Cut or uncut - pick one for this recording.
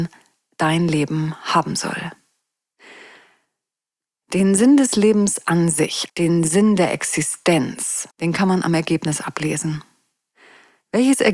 cut